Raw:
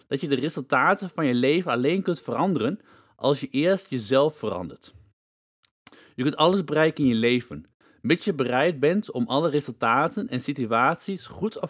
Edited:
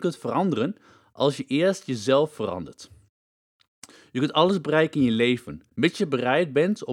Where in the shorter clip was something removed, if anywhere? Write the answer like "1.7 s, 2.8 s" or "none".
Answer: 5.7 s

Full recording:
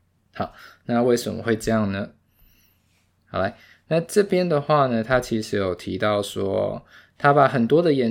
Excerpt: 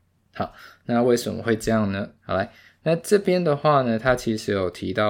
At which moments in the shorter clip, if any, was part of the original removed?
2.2 s

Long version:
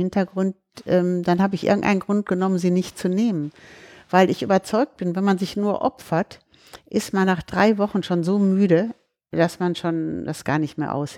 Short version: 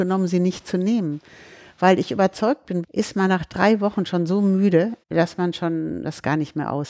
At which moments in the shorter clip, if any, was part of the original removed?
2.8 s, 5.0 s

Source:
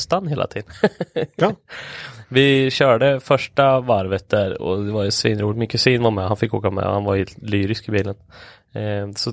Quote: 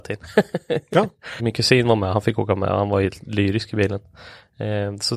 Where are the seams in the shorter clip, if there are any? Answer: 1.4 s

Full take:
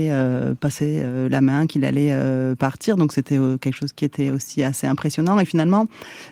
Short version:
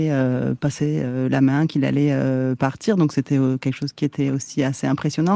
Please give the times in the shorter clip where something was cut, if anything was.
none

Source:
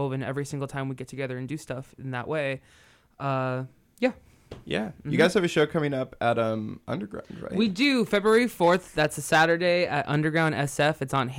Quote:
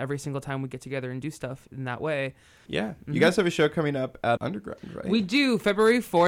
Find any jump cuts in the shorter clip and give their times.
2.7 s, 4.4 s

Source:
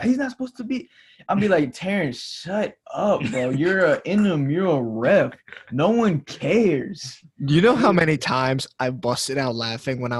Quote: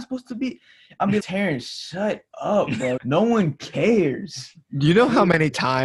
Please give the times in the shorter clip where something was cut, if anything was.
1.2 s, 3.0 s

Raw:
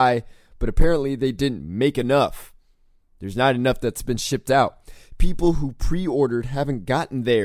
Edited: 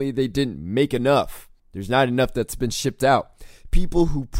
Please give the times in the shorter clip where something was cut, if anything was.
1.6 s

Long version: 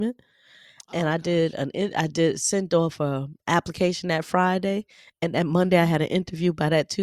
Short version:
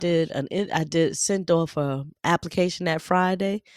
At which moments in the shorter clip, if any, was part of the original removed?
none

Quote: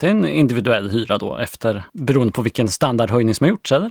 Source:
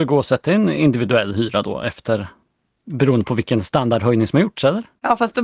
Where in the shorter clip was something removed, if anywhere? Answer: 1.9 s

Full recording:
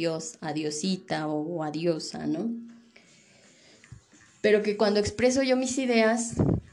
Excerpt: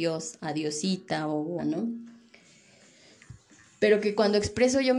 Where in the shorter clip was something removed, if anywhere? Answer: 1.6 s

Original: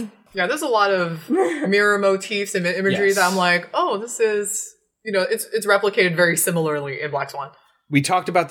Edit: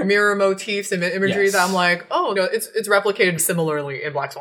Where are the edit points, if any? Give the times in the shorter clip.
2.4 s, 3.4 s

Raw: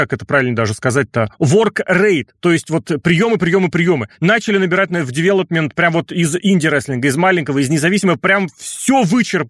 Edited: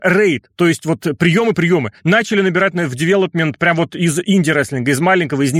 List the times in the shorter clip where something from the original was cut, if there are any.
1.5 s

